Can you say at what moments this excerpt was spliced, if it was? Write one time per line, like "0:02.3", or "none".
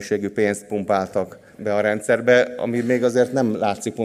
none